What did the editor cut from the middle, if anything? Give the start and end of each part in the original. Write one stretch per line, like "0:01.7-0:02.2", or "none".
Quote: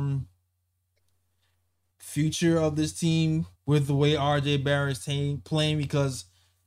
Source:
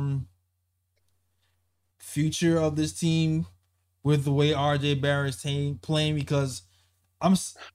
0:03.6-0:03.9

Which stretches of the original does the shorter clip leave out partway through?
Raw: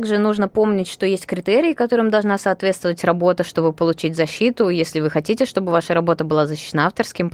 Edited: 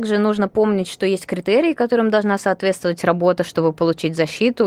none

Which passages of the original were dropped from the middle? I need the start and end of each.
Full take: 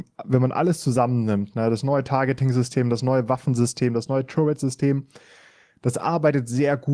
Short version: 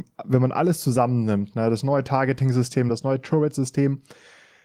0:02.9-0:03.9

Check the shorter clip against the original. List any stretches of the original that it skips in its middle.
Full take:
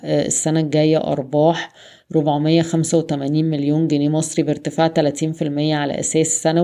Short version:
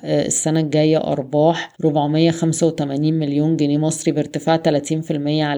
0:01.7-0:02.1

